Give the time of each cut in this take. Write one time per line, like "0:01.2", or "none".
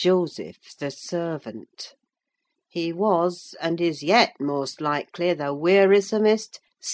0:02.5